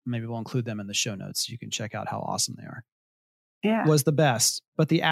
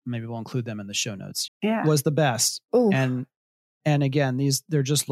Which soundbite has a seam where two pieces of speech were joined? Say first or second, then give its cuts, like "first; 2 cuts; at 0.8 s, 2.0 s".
second; 2 cuts; at 1.5 s, 2.7 s